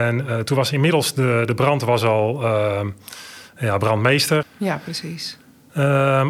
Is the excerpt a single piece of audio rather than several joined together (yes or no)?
no